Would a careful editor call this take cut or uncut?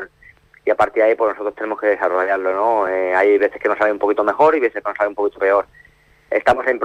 uncut